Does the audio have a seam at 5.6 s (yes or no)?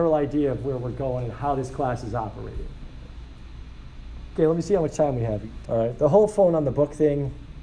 yes